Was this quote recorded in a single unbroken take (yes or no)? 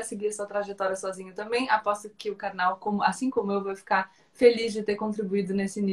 yes